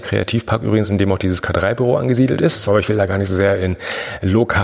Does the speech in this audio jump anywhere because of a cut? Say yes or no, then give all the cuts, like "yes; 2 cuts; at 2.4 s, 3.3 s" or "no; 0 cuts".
yes; 1 cut; at 2.7 s